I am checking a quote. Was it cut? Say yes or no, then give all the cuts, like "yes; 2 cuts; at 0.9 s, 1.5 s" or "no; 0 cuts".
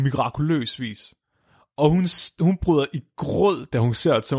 no; 0 cuts